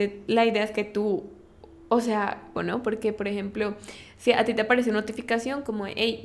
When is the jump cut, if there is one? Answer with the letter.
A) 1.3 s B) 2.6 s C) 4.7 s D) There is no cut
B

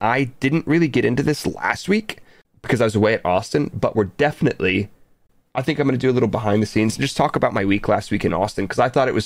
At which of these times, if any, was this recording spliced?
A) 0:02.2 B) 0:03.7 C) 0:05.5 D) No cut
D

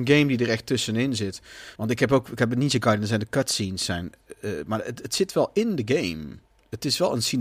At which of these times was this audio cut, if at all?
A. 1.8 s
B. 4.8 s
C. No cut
A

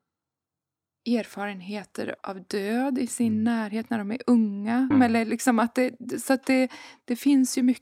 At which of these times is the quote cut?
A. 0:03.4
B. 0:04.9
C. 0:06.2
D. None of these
B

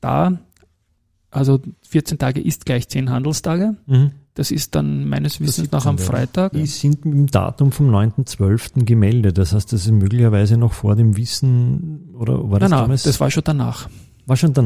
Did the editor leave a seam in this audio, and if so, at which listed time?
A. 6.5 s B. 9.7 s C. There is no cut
A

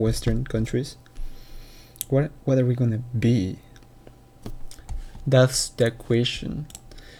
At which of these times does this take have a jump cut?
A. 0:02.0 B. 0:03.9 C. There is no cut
C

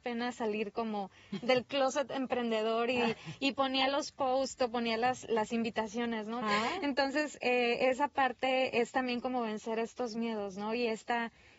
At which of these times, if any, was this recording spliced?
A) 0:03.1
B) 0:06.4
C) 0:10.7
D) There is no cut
B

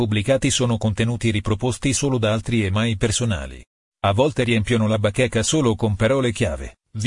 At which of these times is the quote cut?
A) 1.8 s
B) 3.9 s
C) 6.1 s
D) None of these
B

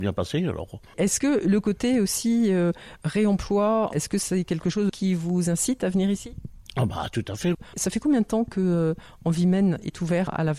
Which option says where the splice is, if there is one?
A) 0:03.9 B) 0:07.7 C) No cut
A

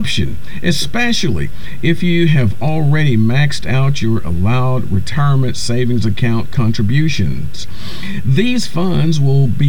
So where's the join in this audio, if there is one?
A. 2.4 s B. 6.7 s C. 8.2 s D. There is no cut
D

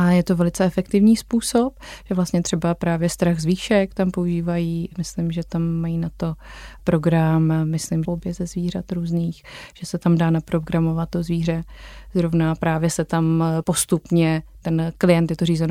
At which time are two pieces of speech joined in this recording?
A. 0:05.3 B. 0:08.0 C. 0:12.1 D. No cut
B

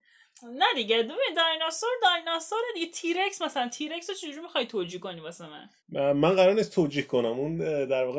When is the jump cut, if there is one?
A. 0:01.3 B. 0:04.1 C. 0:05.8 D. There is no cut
C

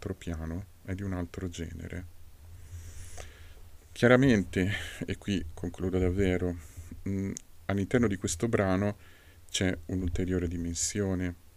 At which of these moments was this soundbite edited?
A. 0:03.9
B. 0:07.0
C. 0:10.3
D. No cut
D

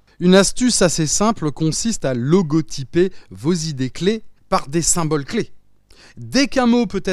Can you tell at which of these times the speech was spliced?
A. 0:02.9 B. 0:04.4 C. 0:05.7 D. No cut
B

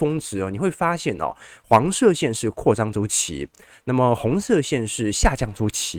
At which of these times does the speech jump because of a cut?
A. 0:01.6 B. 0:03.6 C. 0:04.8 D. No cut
D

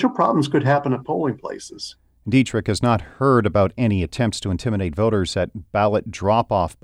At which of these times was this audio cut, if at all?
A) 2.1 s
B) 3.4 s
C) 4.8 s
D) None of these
D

